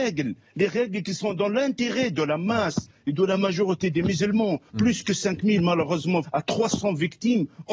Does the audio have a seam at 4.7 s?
yes; 2 cuts; at 4.7 s, 6.2 s

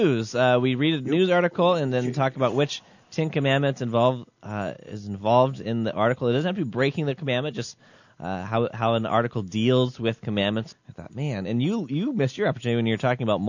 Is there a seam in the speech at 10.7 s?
yes; 1 cut; at 10.7 s

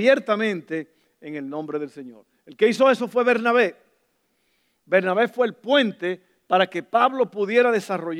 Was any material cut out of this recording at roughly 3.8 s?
no; 0 cuts

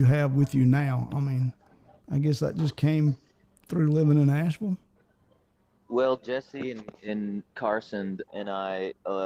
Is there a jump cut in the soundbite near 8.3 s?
yes; 1 cut; at 8.3 s

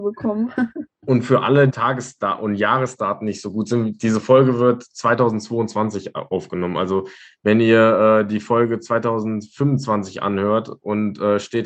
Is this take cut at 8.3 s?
no; 1 cut; at 1.7 s

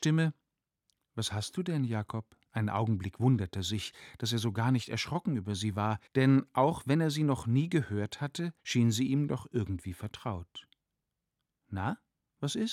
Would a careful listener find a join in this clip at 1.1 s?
no; 3 cuts; at 2.5 s, 6.1 s, 8.6 s

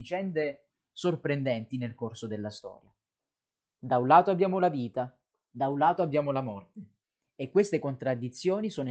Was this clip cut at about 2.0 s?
no; 1 cut; at 3.6 s

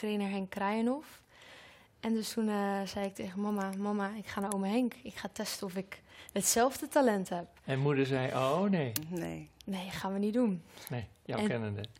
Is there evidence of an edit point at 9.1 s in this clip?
no; 0 cuts

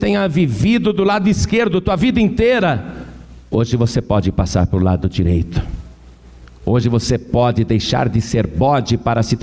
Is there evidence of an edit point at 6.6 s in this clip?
no; 1 cut; at 3.4 s

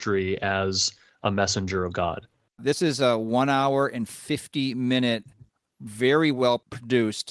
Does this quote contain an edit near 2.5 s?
yes; 1 cut; at 2.5 s

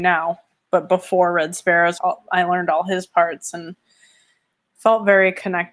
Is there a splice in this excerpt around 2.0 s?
yes; 1 cut; at 2.0 s

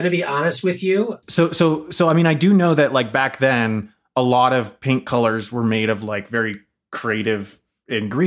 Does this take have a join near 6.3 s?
no; 1 cut; at 1.2 s

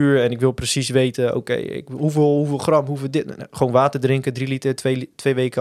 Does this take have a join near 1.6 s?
no; 0 cuts

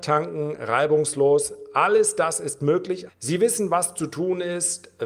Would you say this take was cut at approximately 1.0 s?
no; 1 cut; at 3.1 s

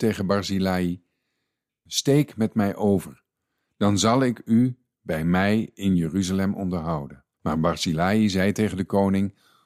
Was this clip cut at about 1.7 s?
no; 1 cut; at 7.3 s

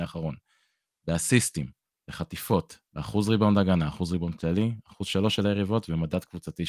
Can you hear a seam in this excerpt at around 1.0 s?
no; 1 cut; at 2.9 s

